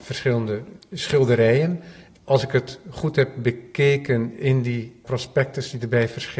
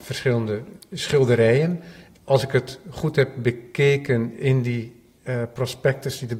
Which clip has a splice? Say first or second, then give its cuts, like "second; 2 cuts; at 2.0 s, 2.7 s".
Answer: first; 1 cut; at 5.0 s